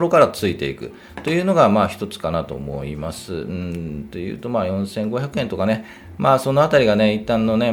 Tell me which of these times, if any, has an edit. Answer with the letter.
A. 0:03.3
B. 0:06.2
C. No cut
C